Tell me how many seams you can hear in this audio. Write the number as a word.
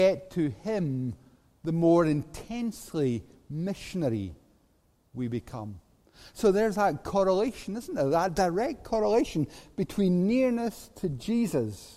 zero